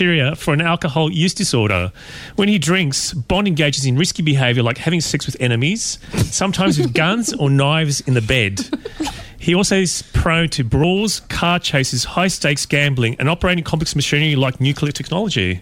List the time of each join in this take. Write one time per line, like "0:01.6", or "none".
none